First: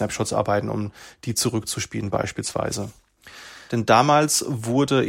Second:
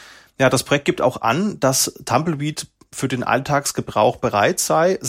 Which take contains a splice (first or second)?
first